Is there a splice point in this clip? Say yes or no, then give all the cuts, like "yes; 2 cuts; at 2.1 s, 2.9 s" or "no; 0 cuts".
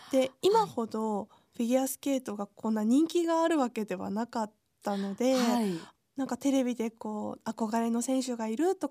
no; 0 cuts